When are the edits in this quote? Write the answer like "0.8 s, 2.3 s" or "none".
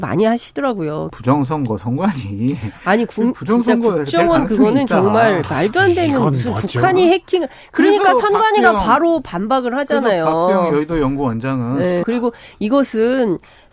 1.1 s, 12.0 s